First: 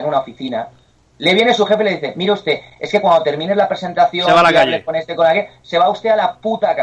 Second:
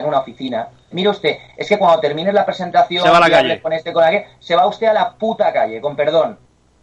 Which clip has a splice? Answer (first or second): second